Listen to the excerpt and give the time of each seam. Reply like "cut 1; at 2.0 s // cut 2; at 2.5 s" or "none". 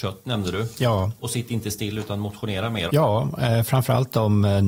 cut 1; at 2.9 s

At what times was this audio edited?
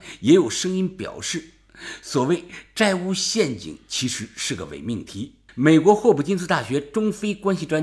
none

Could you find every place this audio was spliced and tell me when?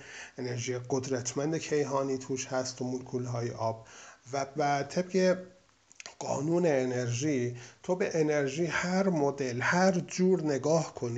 cut 1; at 4.6 s

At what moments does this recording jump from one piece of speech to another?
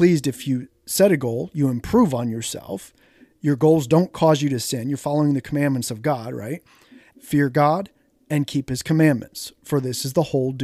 cut 1; at 7.1 s

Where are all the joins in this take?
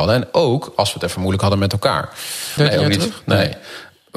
cut 1; at 2.6 s

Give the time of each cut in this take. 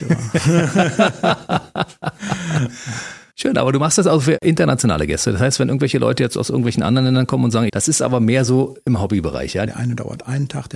cut 1; at 7.7 s // cut 2; at 9.7 s

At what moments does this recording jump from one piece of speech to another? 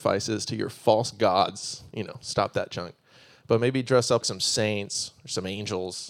cut 1; at 4.2 s

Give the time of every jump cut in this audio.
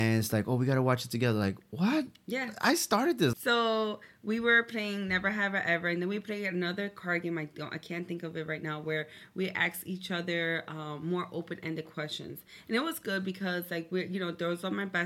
cut 1; at 3.3 s

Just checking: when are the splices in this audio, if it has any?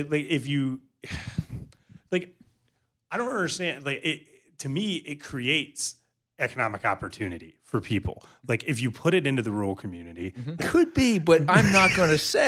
cut 1; at 10.6 s

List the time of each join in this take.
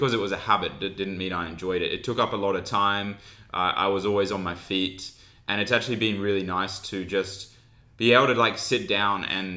none

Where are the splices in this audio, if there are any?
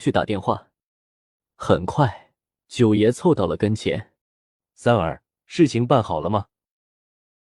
cut 1; at 2.6 s // cut 2; at 4.2 s

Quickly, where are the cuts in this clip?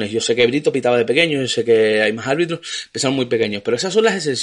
none

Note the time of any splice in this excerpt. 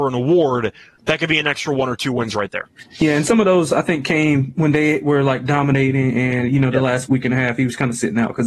cut 1; at 7.1 s

